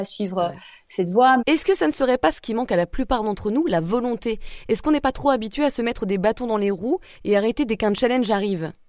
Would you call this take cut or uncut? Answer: cut